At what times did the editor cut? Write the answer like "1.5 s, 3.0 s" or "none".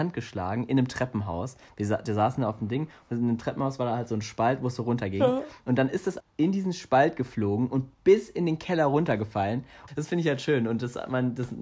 6.2 s, 9.9 s

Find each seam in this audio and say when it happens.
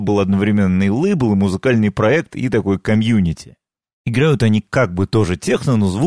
none

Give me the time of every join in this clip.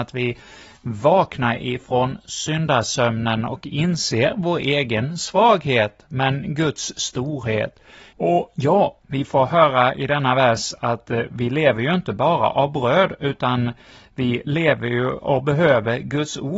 8.1 s

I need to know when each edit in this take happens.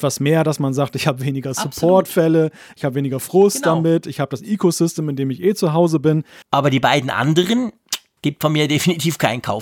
6.4 s, 8.2 s

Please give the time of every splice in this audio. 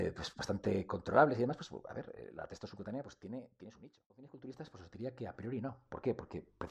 4.1 s

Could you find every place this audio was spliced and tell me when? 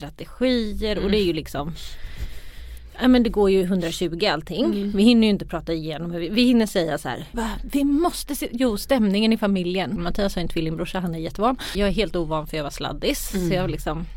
7.3 s, 10.0 s, 11.7 s

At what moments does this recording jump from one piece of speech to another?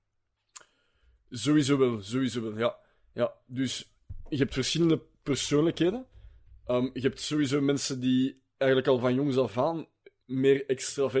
none

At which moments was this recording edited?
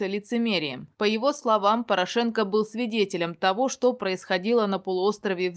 none

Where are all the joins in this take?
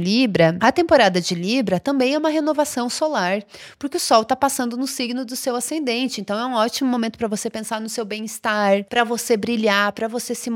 none

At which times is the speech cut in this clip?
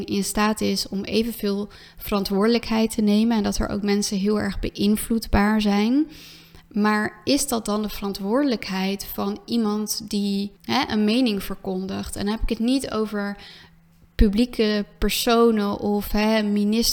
10.6 s

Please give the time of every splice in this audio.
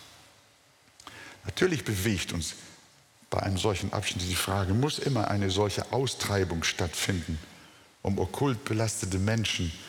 none

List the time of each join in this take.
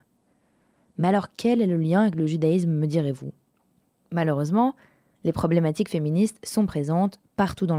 none

